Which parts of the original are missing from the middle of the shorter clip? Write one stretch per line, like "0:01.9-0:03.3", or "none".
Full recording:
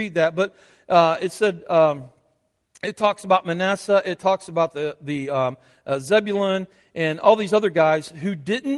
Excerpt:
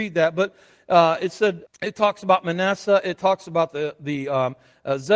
0:01.6-0:02.7